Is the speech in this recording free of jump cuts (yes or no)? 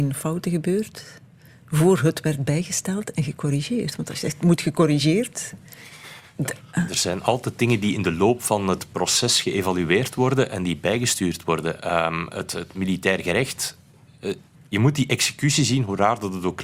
yes